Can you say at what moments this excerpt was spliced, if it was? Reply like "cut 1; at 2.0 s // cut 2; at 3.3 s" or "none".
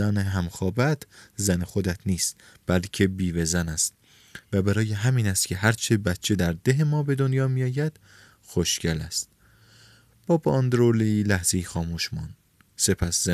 none